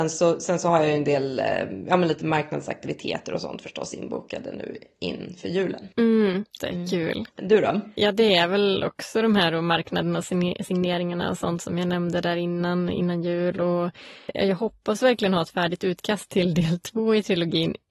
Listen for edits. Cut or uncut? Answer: cut